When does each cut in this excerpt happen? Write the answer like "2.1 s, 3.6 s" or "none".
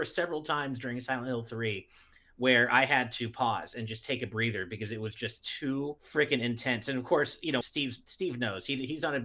6.0 s, 7.6 s